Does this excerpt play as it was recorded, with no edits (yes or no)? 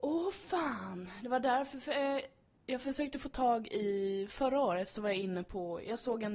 yes